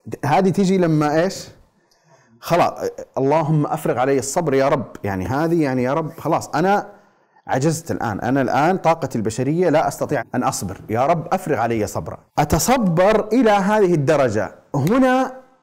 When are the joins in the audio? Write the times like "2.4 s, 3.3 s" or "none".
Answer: 10.2 s, 12.3 s